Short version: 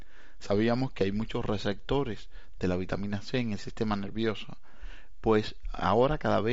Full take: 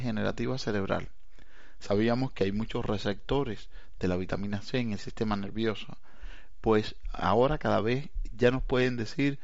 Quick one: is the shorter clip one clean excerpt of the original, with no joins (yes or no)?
yes